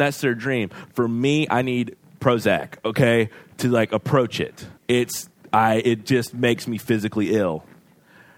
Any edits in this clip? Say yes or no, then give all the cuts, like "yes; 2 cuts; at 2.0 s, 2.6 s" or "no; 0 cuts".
yes; 1 cut; at 4.8 s